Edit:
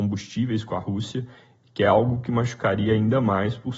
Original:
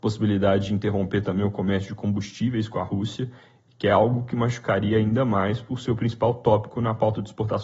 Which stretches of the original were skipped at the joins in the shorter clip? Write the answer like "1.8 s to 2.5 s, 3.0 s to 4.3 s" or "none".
none